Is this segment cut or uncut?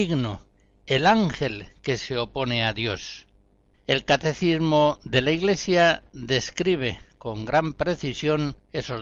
cut